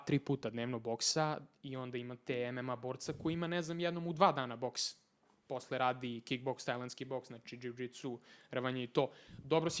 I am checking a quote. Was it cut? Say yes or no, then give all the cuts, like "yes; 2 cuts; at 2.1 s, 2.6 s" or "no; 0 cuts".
no; 0 cuts